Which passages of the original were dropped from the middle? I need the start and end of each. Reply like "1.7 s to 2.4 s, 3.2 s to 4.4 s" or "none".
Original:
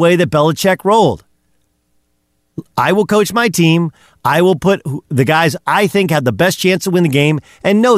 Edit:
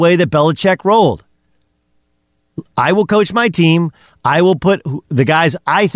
none